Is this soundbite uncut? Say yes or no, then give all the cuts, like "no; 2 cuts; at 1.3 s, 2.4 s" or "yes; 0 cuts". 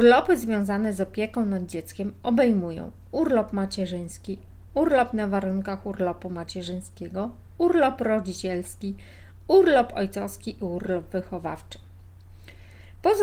yes; 0 cuts